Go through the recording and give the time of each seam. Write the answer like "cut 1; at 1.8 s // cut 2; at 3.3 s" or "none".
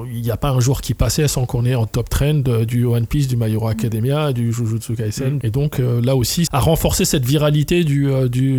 cut 1; at 5.4 s // cut 2; at 6.5 s